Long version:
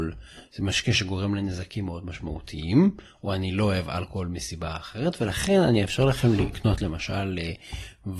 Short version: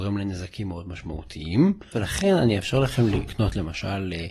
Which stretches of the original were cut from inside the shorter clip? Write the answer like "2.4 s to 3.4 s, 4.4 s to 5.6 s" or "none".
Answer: 3.1 s to 5.2 s